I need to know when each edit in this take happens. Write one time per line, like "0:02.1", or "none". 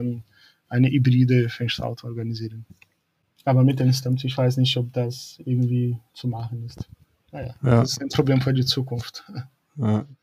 none